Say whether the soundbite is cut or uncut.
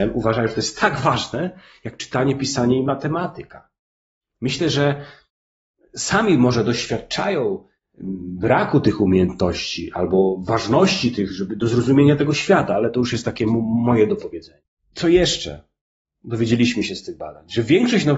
uncut